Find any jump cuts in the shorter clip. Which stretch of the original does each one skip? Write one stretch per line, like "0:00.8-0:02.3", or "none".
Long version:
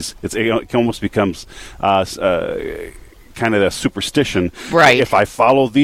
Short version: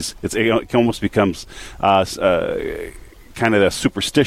none